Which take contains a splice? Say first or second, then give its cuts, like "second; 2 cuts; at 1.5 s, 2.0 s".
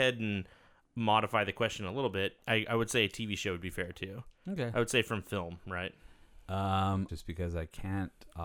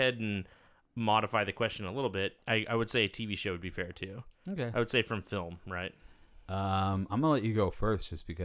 first; 1 cut; at 7.1 s